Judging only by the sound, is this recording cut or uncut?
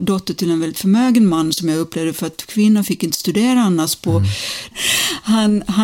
cut